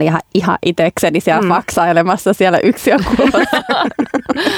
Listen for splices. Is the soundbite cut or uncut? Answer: uncut